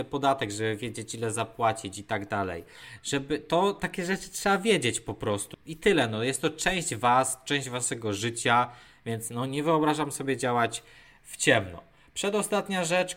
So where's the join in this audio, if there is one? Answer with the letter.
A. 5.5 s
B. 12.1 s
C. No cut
A